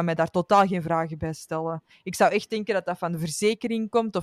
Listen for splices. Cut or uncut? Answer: uncut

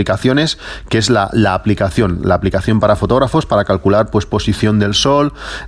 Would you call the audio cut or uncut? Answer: uncut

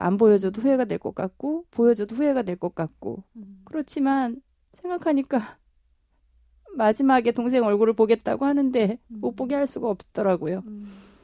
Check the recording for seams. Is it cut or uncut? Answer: uncut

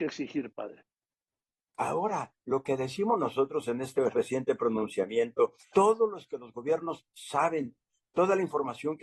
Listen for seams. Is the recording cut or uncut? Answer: cut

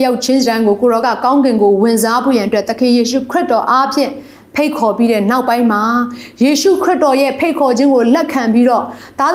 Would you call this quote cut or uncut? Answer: uncut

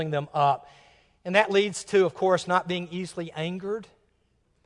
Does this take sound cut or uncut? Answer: uncut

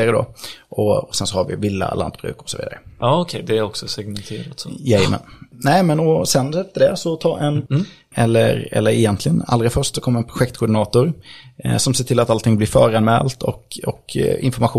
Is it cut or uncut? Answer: cut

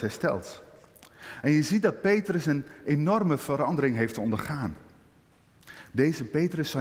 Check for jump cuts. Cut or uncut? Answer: uncut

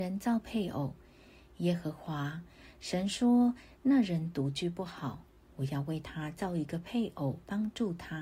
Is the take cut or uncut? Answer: uncut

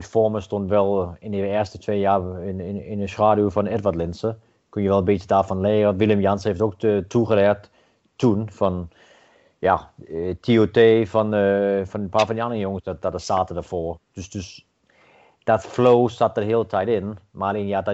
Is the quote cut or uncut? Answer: uncut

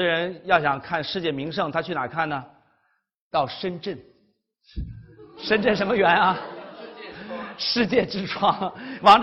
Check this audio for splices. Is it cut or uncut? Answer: uncut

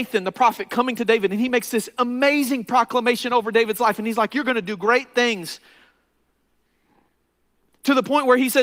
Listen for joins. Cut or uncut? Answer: uncut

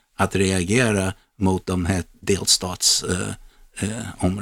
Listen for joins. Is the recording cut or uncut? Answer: uncut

